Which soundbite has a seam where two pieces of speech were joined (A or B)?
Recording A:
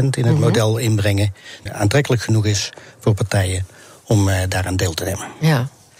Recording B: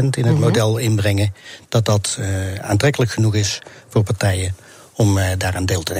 A